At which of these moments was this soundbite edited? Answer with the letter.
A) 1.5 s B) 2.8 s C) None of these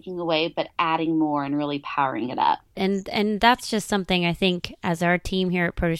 B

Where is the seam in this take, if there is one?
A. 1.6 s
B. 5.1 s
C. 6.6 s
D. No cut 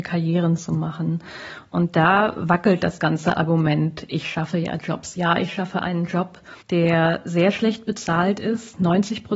C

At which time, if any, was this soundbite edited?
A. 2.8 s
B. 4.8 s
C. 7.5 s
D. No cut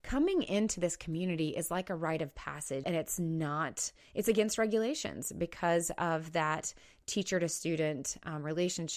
A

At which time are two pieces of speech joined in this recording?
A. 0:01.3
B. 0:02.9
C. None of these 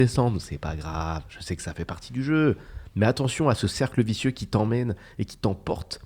B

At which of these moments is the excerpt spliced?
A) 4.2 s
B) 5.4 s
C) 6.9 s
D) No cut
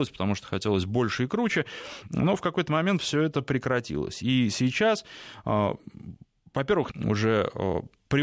C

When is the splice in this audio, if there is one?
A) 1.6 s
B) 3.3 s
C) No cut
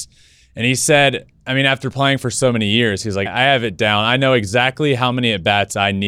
B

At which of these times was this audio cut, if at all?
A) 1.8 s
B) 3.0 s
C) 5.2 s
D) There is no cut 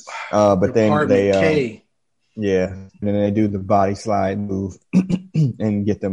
B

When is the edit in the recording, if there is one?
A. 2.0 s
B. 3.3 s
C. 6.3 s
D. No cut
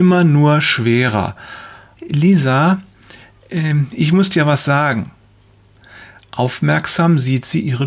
A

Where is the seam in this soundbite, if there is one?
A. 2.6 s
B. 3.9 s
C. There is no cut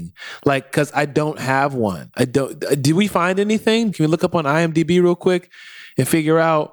B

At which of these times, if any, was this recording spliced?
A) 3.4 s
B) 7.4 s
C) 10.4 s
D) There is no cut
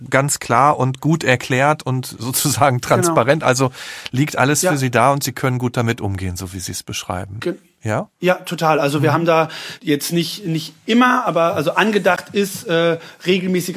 D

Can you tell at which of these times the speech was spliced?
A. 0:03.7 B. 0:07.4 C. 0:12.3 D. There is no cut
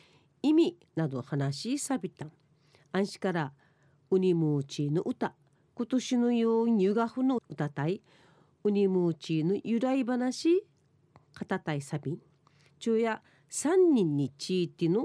B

